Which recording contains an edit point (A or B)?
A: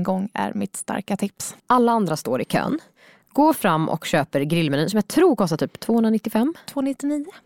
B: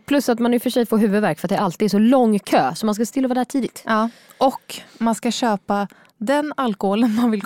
A